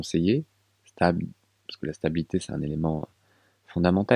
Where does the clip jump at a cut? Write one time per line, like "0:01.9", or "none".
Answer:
none